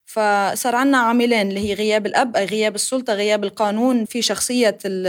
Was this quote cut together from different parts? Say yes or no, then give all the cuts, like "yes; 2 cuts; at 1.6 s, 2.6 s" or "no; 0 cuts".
yes; 1 cut; at 4.1 s